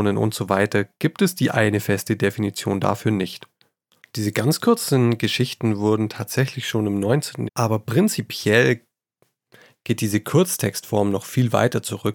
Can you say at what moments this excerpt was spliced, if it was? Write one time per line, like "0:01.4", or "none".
0:04.0
0:07.5